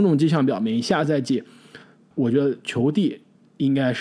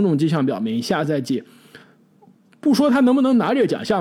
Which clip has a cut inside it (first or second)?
first